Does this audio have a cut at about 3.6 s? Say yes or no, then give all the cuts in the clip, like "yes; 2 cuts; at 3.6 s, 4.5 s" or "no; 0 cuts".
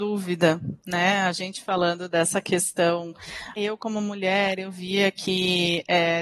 yes; 1 cut; at 3.6 s